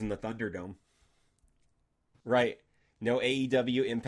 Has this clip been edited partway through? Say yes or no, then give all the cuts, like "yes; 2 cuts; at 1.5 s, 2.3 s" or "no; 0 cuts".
yes; 1 cut; at 2.1 s